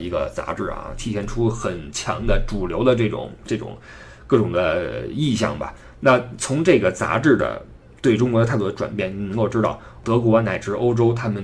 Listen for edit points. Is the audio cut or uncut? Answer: uncut